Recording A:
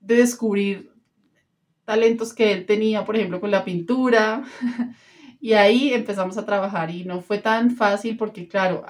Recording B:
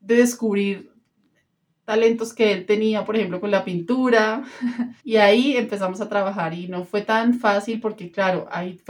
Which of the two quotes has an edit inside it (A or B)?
B